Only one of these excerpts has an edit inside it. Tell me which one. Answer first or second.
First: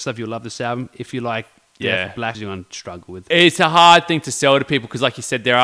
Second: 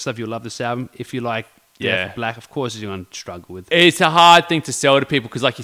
first